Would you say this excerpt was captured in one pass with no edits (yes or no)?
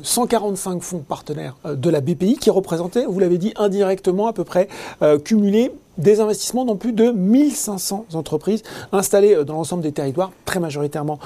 yes